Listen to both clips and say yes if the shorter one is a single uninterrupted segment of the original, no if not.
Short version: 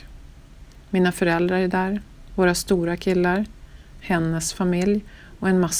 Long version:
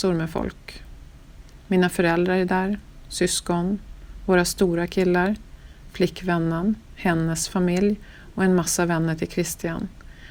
no